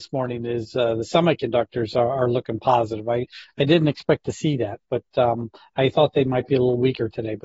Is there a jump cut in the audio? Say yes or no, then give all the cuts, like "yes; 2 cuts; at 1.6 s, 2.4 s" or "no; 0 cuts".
no; 0 cuts